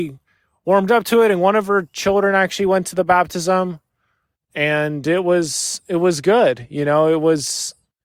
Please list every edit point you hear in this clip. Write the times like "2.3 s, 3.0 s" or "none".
none